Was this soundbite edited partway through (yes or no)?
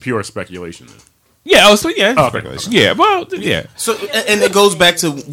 no